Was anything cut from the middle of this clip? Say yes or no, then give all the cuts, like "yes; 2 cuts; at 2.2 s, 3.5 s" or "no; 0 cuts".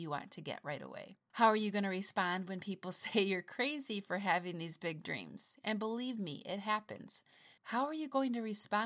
yes; 1 cut; at 7.6 s